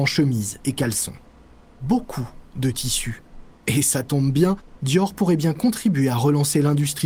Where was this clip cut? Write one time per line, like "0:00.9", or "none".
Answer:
0:01.8
0:04.8

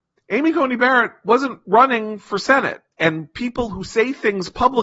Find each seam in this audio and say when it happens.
none

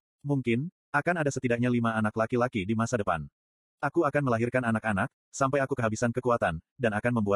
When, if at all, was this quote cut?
none

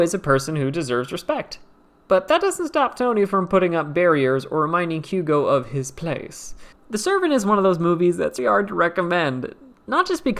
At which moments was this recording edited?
0:06.7
0:08.4

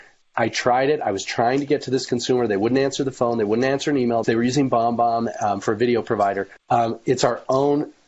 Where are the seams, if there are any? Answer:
0:04.2
0:06.6

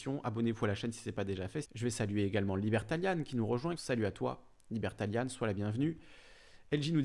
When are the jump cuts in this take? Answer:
0:01.6
0:03.8

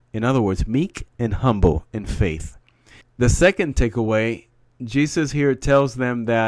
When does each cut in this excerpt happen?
0:03.0

